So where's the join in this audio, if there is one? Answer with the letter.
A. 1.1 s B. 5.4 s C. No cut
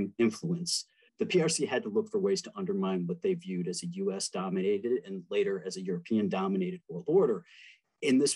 A